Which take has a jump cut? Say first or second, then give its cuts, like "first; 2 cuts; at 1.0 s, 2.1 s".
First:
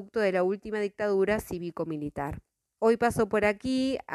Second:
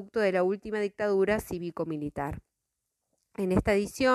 first; 1 cut; at 2.8 s